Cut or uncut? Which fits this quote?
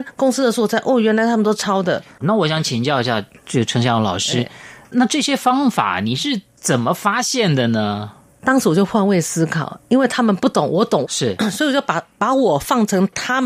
cut